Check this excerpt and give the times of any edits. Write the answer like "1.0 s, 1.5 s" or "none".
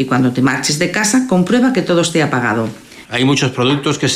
3.0 s